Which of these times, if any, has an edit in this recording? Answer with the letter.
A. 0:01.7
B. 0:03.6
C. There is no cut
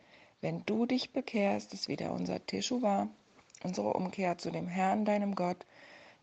C